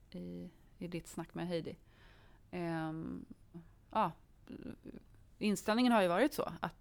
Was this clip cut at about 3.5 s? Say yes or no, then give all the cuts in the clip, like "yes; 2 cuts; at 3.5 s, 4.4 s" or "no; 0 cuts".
yes; 1 cut; at 3.5 s